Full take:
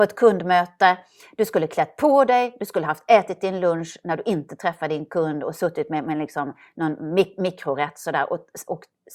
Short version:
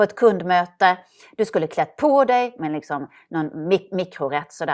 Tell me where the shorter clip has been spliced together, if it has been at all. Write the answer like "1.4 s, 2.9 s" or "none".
2.6 s